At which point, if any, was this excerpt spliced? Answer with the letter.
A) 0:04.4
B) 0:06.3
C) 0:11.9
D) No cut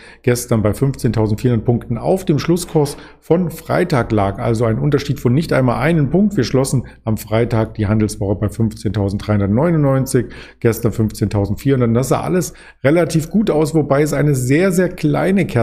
D